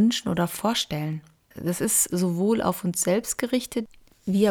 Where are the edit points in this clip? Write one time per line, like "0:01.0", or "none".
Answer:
0:01.5